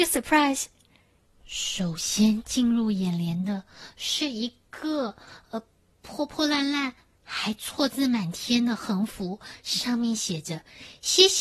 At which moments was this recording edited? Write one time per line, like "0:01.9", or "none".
0:01.3